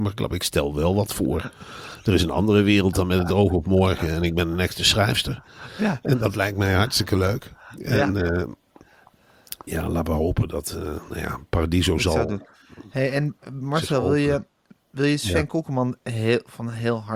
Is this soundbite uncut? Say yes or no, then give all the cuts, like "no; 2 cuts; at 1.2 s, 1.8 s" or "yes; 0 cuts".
yes; 0 cuts